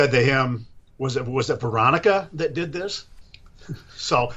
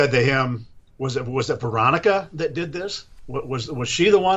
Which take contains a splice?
first; 1 cut; at 3.2 s

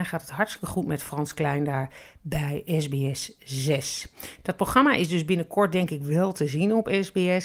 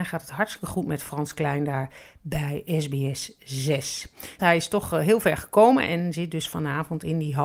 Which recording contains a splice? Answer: second; 1 cut; at 4.4 s

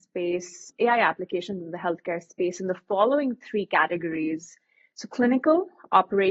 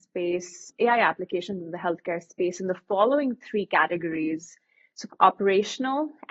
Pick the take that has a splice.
second; 1 cut; at 5.1 s

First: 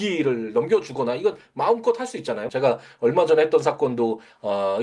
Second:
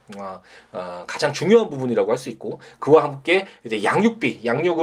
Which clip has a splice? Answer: first; 1 cut; at 2.5 s

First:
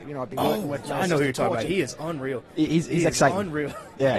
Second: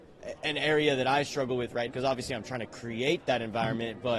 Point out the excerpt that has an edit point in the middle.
second; 1 cut; at 1.9 s

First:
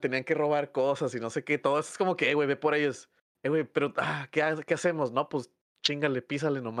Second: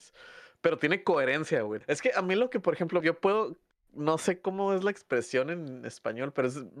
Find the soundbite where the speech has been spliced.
second; 2 cuts; at 1.8 s, 3.0 s

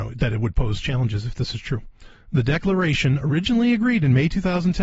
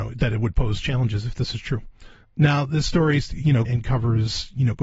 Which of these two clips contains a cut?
second; 2 cuts; at 2.2 s, 3.6 s

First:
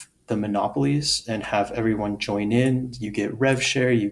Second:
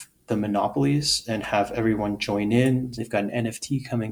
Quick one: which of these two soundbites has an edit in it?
second; 1 cut; at 3.0 s

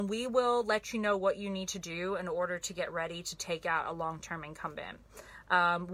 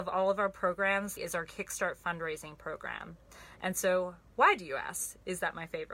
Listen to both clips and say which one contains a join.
second; 1 cut; at 1.2 s

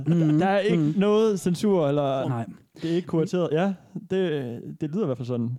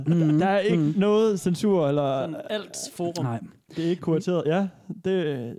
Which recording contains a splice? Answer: first; 1 cut; at 2.2 s

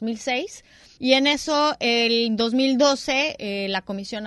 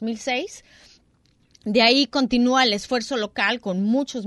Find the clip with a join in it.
first; 1 cut; at 1.0 s

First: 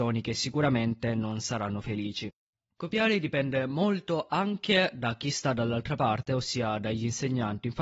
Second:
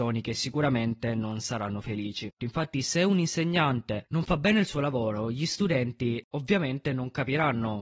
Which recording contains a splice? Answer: second; 1 cut; at 2.4 s

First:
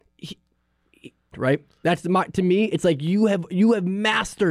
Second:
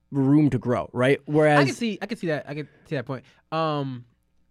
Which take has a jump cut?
first; 1 cut; at 1.3 s

